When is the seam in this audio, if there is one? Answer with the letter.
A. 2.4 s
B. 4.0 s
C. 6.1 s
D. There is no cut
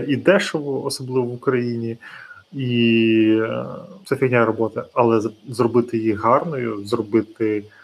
B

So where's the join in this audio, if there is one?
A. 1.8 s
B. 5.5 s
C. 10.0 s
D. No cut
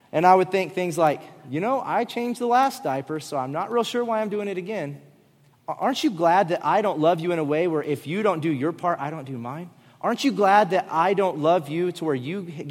B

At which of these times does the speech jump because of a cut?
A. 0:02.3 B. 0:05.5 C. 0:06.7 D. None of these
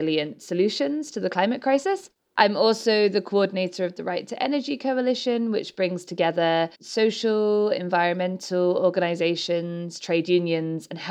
C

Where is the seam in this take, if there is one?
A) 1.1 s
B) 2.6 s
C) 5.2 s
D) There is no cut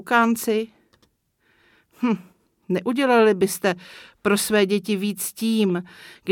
D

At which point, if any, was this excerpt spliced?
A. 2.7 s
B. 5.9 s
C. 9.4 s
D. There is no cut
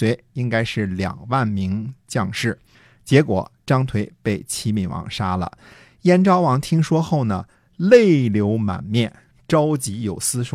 D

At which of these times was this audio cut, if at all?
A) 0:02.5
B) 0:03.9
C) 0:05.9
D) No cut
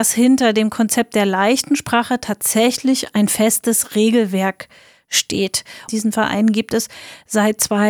C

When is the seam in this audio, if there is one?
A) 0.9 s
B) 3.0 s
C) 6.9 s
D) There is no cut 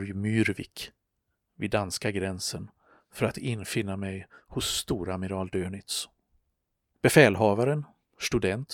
C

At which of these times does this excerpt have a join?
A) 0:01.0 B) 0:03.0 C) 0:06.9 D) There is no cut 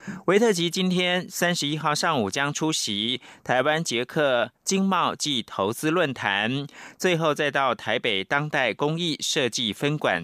C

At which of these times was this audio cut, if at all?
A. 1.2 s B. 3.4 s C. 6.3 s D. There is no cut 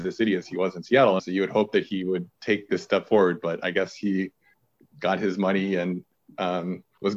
A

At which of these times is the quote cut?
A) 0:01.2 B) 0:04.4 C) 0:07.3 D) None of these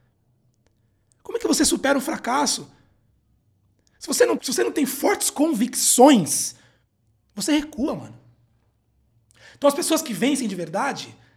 B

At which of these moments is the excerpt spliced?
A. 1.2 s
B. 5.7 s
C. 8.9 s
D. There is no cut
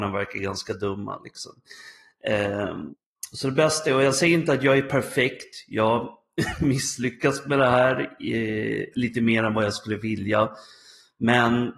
C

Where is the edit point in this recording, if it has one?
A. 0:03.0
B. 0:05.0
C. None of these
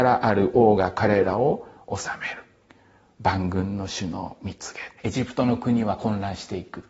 B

